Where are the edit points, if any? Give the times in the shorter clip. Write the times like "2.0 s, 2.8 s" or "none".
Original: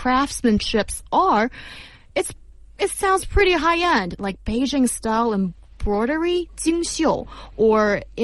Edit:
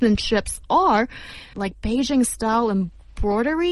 1.5 s